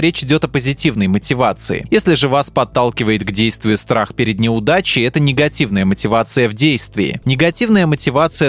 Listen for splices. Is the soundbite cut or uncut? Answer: cut